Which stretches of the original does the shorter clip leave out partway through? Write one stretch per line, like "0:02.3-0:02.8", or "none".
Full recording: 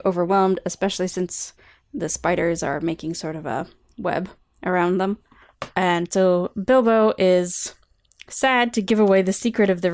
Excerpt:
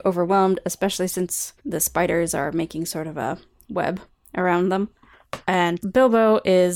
0:01.6-0:01.9
0:06.1-0:06.5